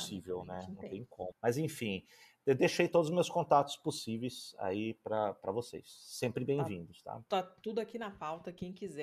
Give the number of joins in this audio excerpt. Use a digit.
1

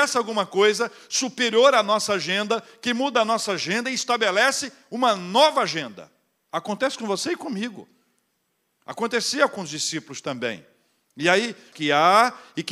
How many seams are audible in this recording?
1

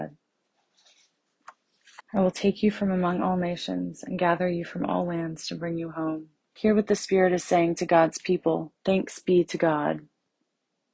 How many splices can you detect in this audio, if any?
3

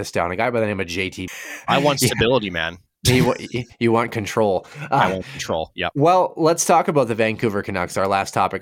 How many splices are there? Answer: 1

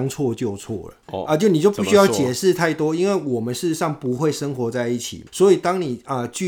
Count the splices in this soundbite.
2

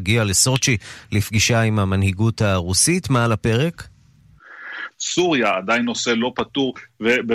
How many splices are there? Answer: 1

